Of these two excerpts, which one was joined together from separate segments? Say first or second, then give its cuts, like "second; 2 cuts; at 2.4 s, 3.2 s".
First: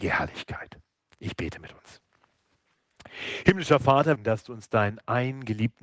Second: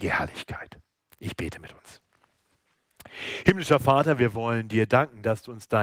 first; 1 cut; at 4.2 s